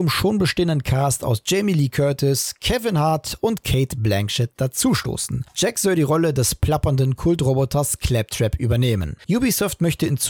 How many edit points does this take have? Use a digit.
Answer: 1